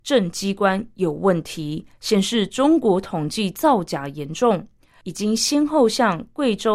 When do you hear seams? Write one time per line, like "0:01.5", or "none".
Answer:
0:05.0